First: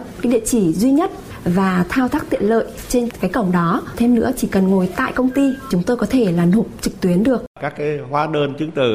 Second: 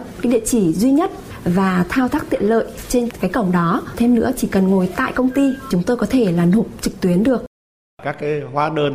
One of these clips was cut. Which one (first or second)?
first